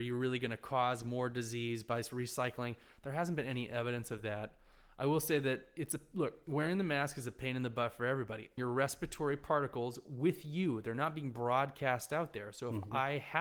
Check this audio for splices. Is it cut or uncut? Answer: cut